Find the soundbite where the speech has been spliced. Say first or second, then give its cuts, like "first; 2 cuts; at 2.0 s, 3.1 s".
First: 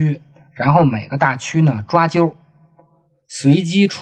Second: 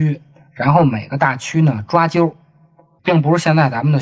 second; 1 cut; at 3.0 s